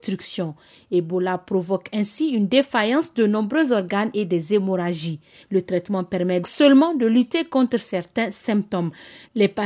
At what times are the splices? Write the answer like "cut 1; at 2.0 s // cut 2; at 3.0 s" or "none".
cut 1; at 5.4 s // cut 2; at 6.4 s

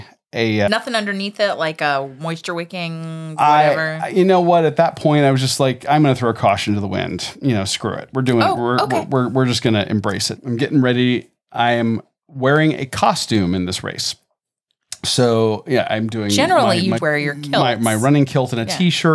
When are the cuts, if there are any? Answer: cut 1; at 10.4 s // cut 2; at 17.0 s

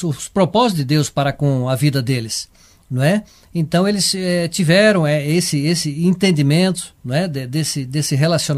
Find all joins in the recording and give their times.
none

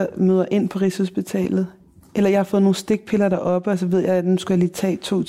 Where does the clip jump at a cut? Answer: none

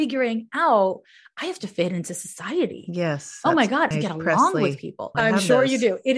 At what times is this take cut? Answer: cut 1; at 3.9 s // cut 2; at 5.1 s

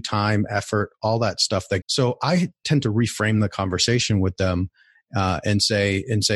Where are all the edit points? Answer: cut 1; at 1.8 s

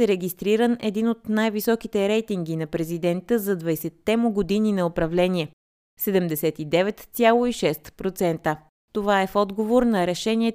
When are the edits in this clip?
cut 1; at 8.7 s

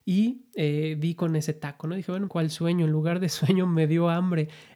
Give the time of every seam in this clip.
cut 1; at 2.3 s

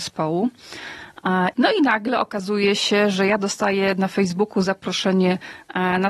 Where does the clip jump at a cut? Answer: cut 1; at 1.5 s

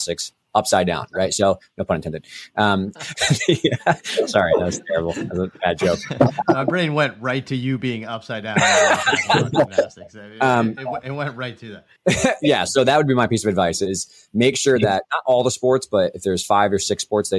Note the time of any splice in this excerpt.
cut 1; at 2.9 s // cut 2; at 12.0 s

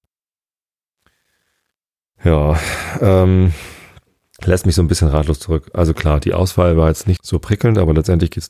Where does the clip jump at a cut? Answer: cut 1; at 7.2 s

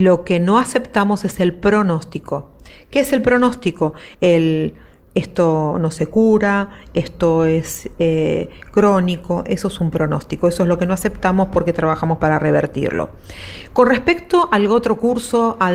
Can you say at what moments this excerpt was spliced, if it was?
none

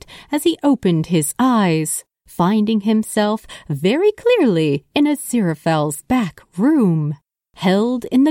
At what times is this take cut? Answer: none

